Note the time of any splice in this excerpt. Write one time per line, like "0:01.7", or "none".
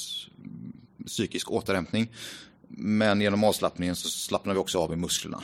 none